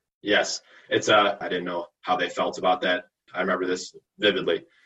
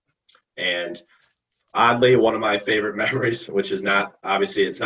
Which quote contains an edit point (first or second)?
first